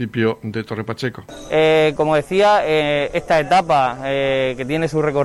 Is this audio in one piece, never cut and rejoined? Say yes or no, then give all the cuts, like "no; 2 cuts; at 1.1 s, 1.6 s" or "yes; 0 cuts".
yes; 0 cuts